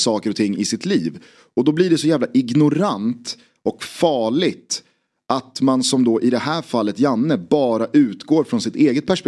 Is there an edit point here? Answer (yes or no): no